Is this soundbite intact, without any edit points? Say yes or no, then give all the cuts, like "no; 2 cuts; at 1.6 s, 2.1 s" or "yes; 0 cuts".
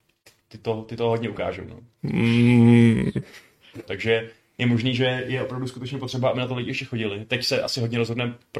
no; 2 cuts; at 2.0 s, 3.9 s